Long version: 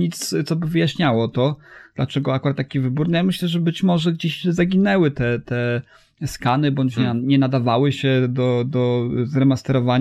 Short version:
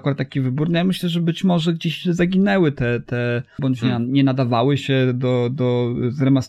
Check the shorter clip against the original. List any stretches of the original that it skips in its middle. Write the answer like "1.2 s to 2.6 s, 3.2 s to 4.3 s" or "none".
6.0 s to 6.7 s